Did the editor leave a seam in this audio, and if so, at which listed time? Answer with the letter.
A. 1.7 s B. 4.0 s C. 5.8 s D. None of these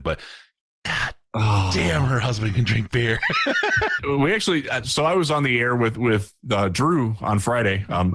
B